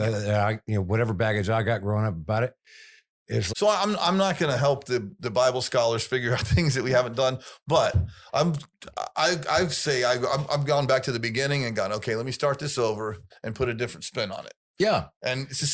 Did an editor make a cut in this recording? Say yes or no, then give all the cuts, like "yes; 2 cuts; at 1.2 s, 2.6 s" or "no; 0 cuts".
yes; 1 cut; at 3.5 s